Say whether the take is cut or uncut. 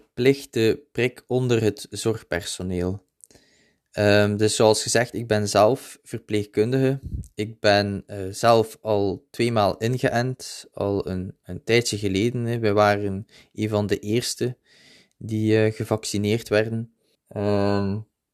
cut